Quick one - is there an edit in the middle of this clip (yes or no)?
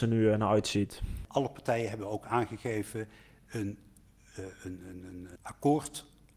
yes